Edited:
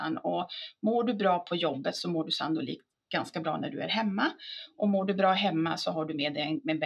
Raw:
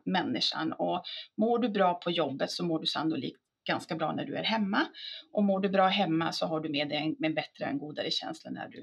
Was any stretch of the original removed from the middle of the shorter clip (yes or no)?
no